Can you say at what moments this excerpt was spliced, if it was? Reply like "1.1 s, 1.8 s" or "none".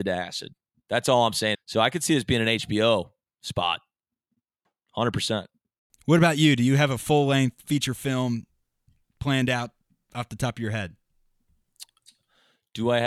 1.5 s